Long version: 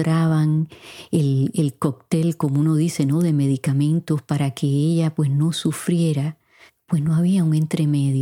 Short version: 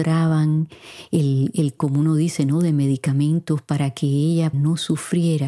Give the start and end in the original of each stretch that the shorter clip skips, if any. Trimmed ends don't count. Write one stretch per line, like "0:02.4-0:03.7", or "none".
0:01.8-0:02.4
0:05.1-0:05.3